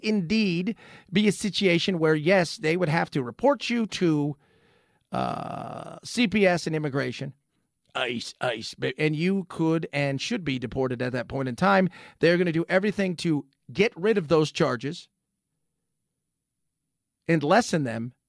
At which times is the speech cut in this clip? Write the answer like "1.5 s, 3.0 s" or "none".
none